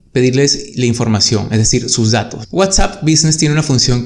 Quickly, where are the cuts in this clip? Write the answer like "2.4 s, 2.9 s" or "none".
2.4 s